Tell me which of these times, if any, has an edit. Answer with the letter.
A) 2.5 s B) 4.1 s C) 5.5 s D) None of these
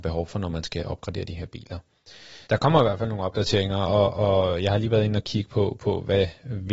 A